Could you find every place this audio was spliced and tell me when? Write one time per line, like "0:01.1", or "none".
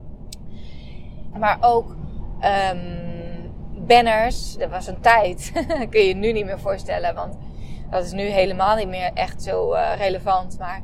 0:01.3